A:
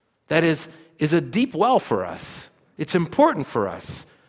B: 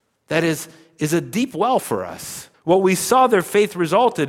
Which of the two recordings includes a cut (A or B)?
B